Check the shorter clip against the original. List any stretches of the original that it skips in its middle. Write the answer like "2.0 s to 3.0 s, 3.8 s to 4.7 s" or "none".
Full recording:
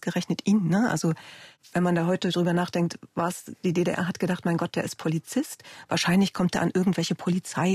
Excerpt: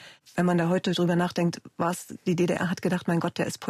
none